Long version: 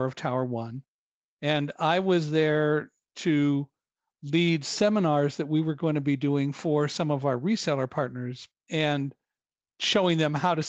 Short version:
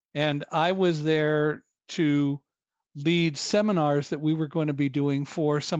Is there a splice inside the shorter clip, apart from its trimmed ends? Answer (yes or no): no